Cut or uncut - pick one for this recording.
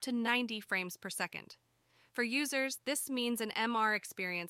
uncut